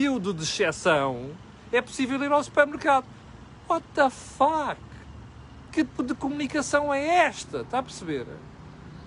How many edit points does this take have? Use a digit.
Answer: 1